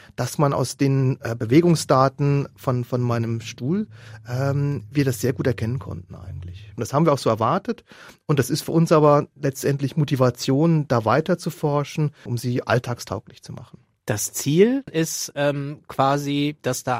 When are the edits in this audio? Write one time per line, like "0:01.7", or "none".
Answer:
0:06.8
0:12.3
0:14.9